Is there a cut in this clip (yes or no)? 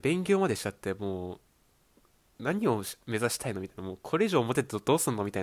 no